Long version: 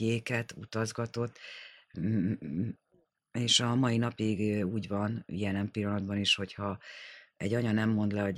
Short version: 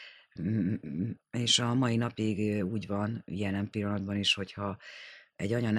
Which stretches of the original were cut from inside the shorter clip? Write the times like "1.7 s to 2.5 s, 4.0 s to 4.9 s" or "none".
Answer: 2.8 s to 3.2 s